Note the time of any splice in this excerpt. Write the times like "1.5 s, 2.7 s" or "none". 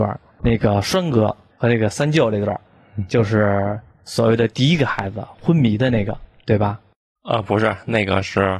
none